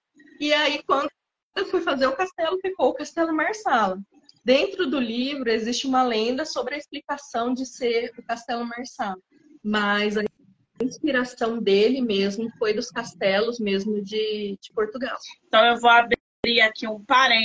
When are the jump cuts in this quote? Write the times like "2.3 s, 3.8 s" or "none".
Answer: none